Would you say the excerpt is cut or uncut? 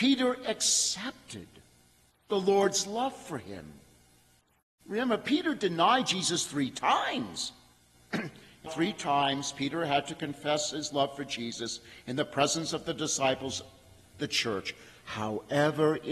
cut